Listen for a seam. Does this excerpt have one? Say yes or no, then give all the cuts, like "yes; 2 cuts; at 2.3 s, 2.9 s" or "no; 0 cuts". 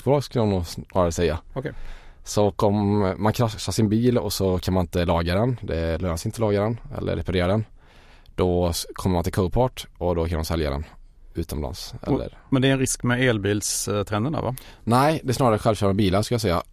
no; 0 cuts